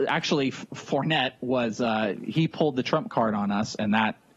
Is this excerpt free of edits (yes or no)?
yes